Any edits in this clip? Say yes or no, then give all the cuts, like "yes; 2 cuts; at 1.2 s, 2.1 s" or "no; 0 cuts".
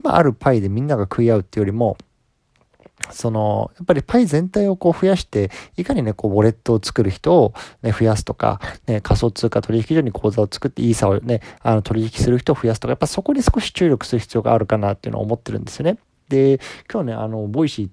no; 0 cuts